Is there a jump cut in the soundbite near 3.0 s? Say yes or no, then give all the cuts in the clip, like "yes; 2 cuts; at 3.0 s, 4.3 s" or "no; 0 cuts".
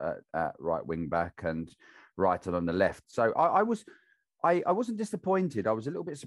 yes; 1 cut; at 3.0 s